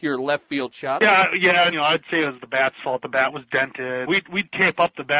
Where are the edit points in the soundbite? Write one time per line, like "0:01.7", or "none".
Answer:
0:01.7
0:04.1